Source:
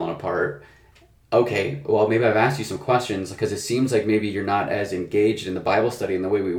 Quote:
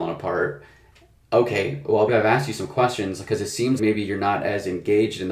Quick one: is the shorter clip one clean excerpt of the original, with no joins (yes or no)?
no